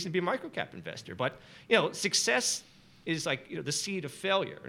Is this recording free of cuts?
yes; 0 cuts

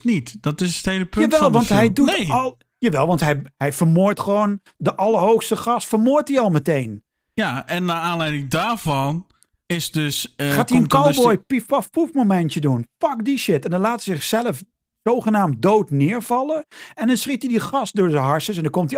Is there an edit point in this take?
no; 0 cuts

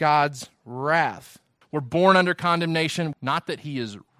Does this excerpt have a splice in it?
yes; 2 cuts; at 1.6 s, 3.1 s

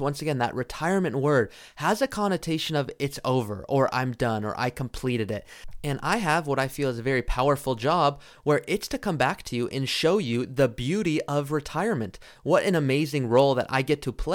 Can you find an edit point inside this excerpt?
no; 0 cuts

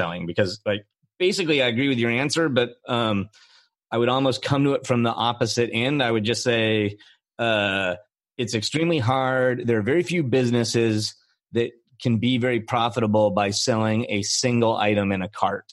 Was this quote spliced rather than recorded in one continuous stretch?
no; 0 cuts

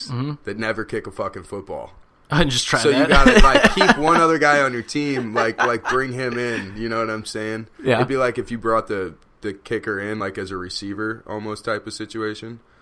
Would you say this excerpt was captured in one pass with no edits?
yes; 0 cuts

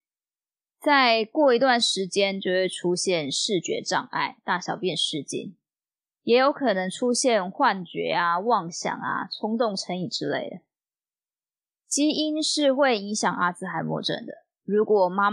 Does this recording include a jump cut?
no; 0 cuts

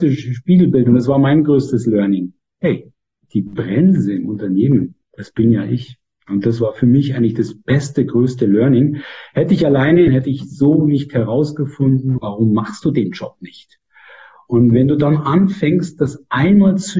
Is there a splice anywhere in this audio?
yes; 2 cuts; at 10.1 s, 12.2 s

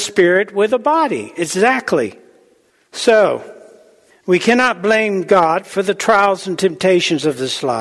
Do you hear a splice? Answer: no; 0 cuts

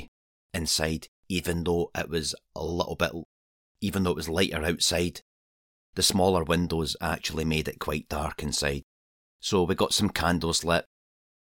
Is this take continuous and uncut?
yes; 0 cuts

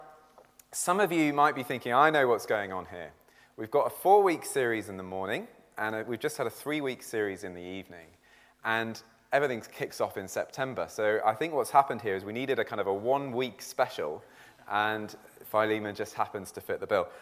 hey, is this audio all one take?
yes; 0 cuts

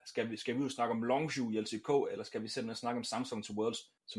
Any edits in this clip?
no; 0 cuts

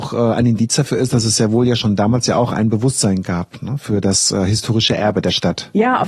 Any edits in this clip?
no; 0 cuts

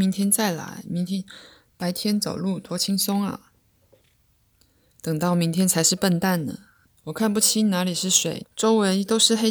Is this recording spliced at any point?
yes; 2 cuts; at 6.9 s, 8.4 s

